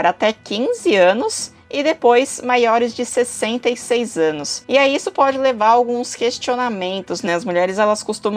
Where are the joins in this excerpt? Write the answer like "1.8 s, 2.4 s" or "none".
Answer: 7.3 s